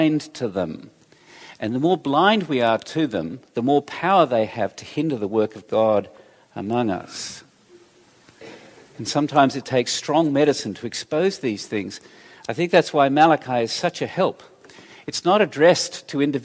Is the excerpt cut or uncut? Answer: uncut